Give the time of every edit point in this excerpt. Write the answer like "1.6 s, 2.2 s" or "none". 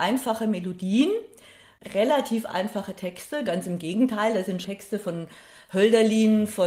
3.5 s, 4.6 s